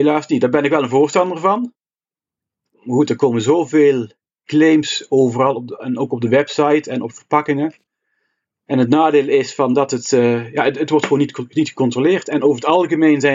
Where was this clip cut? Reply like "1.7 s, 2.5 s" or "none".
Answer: none